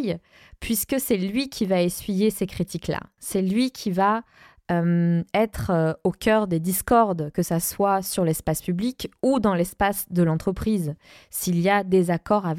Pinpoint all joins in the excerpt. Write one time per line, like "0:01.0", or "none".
none